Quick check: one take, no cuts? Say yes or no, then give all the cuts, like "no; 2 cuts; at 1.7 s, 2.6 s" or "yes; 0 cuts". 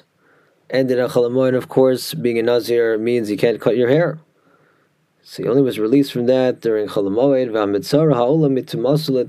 yes; 0 cuts